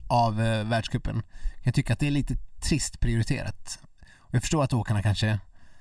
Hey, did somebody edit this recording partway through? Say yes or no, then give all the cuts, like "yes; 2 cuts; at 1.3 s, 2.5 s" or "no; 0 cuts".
no; 0 cuts